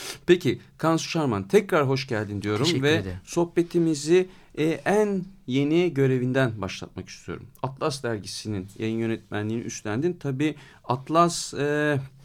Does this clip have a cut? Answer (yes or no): no